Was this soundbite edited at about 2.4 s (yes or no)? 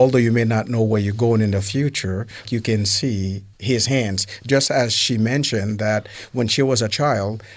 yes